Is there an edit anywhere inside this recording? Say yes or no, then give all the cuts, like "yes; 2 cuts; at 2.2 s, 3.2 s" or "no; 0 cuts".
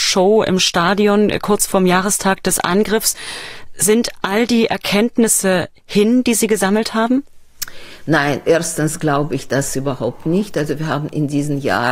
no; 0 cuts